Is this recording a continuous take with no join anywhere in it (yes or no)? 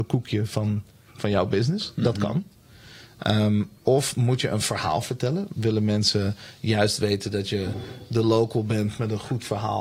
no